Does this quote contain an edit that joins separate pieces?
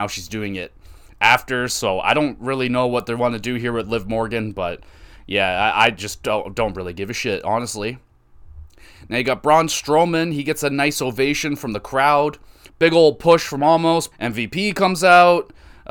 yes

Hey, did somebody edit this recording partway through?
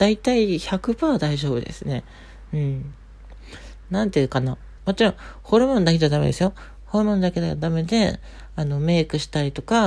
yes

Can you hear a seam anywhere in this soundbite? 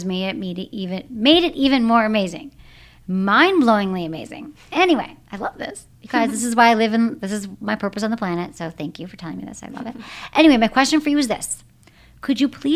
no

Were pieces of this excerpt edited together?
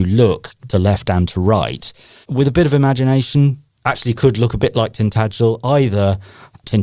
yes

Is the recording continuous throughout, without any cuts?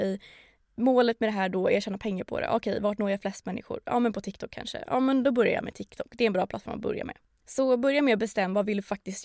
no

